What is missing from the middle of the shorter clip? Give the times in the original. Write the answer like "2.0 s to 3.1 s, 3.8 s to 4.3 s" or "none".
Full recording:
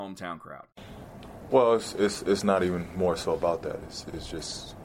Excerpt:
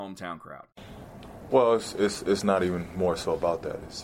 none